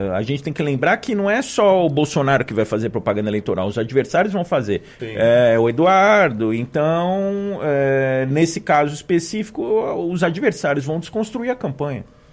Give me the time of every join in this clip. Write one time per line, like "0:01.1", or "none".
0:05.0